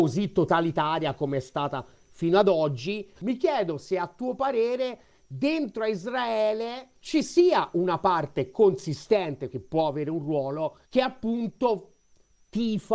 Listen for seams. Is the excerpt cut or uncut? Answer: cut